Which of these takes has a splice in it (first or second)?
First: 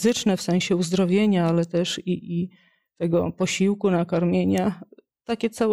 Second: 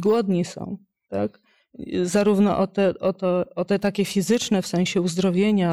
second